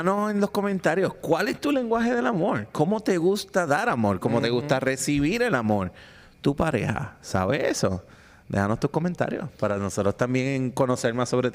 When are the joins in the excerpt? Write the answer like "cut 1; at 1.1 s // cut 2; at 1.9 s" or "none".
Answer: none